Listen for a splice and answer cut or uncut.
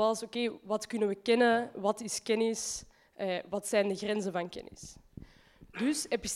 uncut